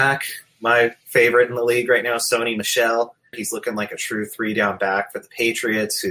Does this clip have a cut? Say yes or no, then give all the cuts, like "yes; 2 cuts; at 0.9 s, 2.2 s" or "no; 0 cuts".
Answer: yes; 1 cut; at 3.3 s